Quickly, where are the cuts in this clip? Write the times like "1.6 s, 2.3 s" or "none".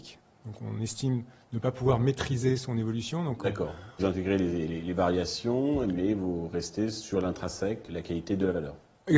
4.0 s, 7.9 s